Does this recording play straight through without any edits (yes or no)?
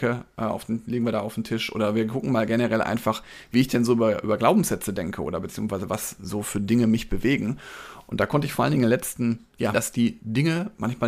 no